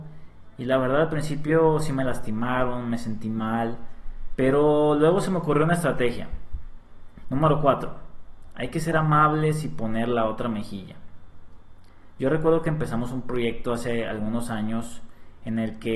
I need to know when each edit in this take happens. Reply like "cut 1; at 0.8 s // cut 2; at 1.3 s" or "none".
cut 1; at 7.2 s